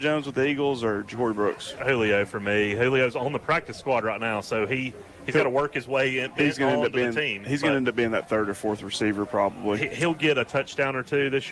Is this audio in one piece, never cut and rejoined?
yes; 0 cuts

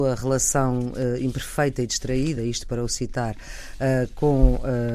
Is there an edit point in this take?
no; 0 cuts

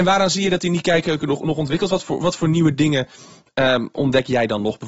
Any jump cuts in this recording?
no; 0 cuts

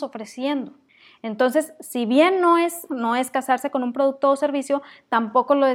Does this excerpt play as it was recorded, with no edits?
no; 1 cut; at 2.9 s

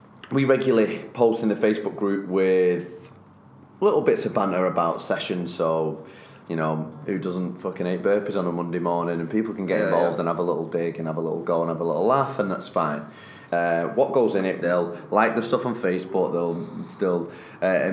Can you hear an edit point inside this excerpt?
yes; 2 cuts; at 13.5 s, 14.6 s

